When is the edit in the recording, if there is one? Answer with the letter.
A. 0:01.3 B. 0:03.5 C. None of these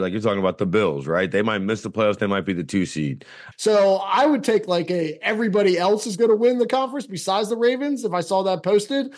B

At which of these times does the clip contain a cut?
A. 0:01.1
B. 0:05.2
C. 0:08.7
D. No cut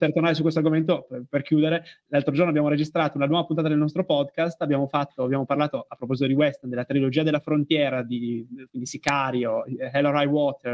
C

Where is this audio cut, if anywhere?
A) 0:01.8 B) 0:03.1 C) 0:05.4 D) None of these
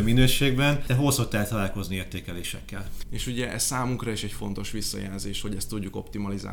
B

